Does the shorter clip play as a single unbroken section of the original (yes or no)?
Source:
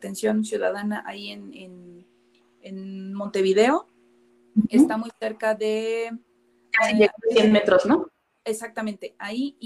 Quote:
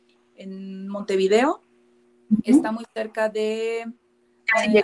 yes